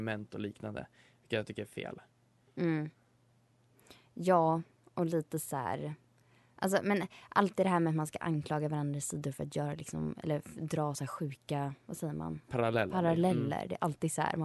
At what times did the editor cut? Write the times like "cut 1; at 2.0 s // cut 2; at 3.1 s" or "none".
none